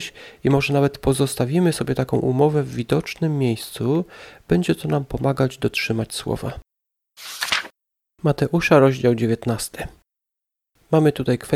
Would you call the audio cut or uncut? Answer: uncut